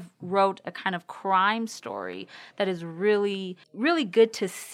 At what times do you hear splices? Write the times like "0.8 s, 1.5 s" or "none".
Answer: 3.6 s